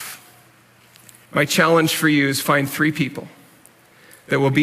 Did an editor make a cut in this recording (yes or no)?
yes